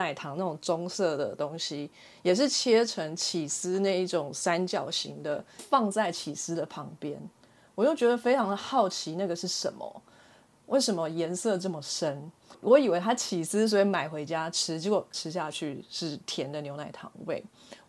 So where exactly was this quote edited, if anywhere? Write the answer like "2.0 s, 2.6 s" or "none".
none